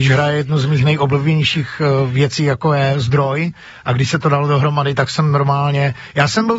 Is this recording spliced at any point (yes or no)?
no